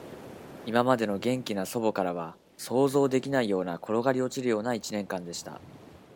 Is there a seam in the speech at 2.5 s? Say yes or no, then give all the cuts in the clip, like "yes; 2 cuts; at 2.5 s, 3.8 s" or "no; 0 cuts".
yes; 1 cut; at 2.5 s